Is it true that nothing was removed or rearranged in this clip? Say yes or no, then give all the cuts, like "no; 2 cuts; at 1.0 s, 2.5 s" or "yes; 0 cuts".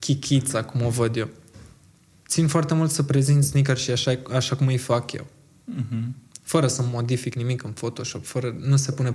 yes; 0 cuts